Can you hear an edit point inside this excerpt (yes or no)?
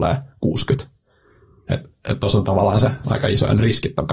yes